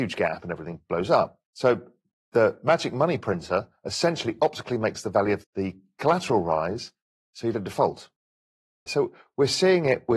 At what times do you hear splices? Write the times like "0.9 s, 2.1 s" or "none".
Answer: 1.4 s, 5.4 s, 8.9 s